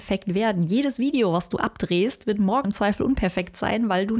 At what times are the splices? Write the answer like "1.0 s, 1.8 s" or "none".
2.6 s